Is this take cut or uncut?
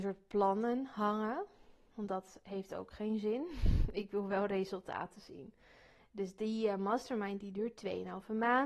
uncut